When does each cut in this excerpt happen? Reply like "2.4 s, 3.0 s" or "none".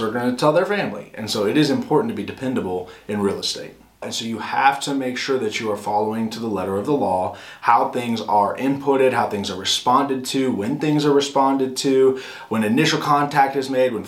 4.0 s